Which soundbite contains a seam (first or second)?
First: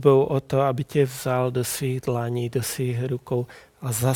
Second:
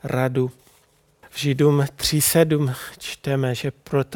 second